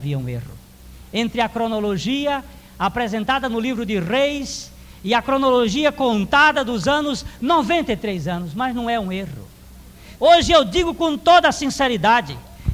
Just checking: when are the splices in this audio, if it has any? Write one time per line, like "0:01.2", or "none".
0:10.2